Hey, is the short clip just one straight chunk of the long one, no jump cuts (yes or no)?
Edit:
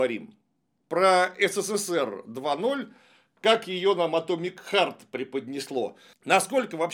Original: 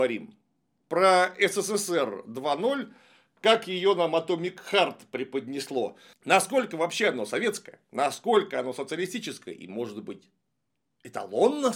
yes